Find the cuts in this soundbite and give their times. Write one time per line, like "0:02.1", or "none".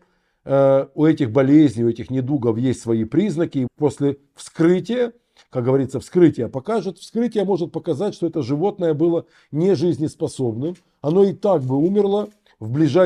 0:03.7

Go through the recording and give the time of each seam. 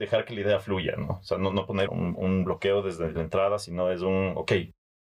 0:01.9
0:03.1

